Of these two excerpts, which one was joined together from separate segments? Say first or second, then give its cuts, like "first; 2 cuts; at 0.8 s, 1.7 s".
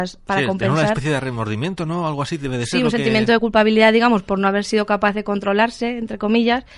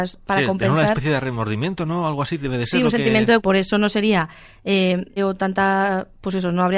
second; 2 cuts; at 3.4 s, 5.2 s